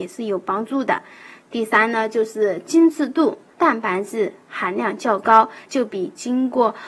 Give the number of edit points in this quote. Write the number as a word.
two